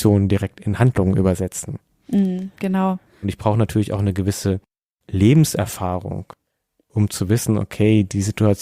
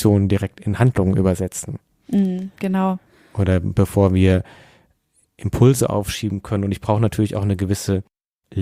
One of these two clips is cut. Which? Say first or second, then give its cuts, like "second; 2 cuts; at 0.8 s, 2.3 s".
first; 1 cut; at 3.2 s